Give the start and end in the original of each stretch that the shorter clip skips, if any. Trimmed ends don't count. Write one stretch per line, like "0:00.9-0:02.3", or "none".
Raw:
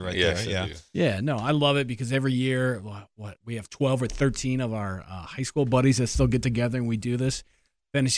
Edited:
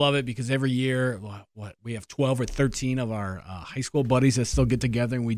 none

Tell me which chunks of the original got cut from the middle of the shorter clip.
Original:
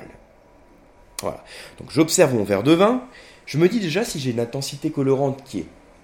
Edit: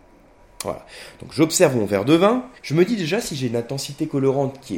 0:03.2-0:03.4

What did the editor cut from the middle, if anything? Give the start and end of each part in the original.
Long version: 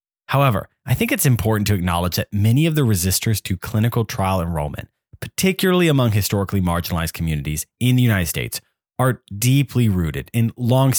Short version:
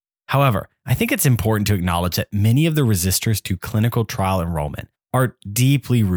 0:04.9-0:08.8

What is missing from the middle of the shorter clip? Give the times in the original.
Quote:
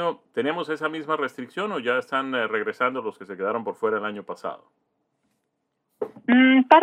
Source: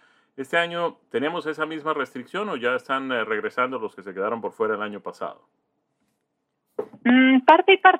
none

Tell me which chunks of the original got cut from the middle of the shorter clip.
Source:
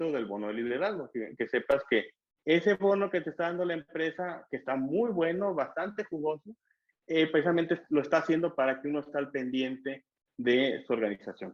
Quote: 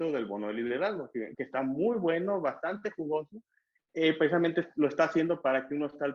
0:01.3-0:04.5

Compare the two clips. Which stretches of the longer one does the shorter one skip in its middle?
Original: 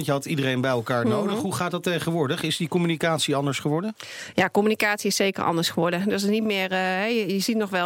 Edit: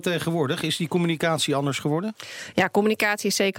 none

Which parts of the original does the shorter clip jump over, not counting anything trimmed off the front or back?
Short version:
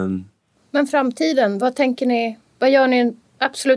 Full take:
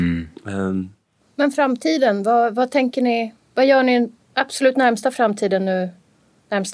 0:02.2-0:02.5

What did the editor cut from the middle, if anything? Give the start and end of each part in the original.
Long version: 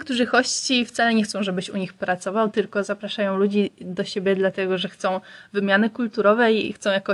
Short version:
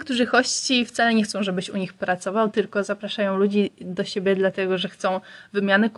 none

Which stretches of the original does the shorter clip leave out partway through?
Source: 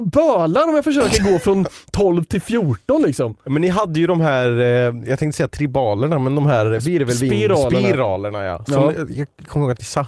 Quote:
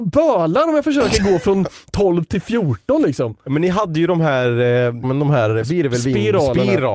0:05.0-0:06.2

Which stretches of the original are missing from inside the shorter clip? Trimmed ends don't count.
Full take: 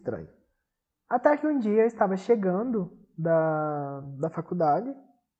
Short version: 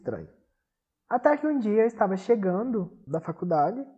0:03.1-0:04.2

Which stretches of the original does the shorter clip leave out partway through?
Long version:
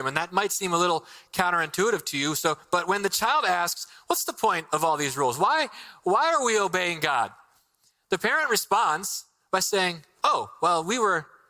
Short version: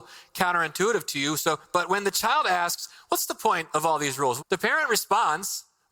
0:05.4-0:08.0

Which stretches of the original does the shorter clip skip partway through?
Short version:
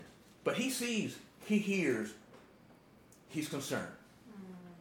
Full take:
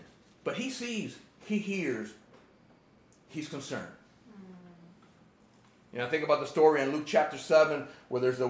none

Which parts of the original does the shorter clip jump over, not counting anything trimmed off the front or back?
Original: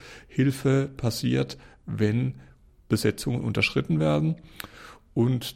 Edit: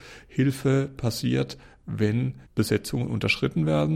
0:02.5-0:02.8

